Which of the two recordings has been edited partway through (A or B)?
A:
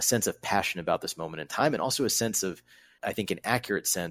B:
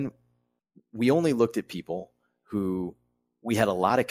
A